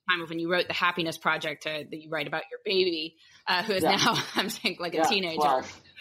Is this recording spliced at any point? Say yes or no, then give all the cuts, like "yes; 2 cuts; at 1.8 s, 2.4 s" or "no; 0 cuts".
no; 0 cuts